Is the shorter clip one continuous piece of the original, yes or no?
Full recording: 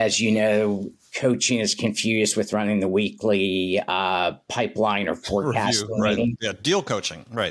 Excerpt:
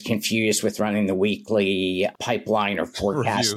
no